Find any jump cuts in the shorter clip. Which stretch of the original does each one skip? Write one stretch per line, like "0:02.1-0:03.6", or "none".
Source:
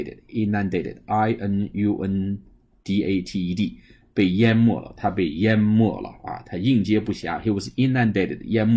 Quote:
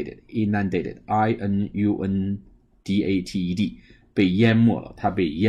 none